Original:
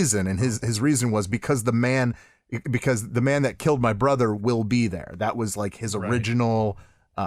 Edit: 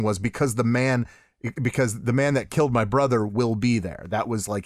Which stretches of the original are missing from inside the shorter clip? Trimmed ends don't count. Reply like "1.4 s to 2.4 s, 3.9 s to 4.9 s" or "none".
none

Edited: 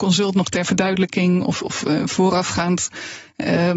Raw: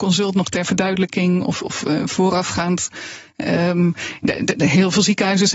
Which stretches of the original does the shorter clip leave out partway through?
none

